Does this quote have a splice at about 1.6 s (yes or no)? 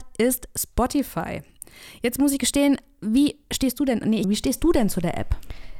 no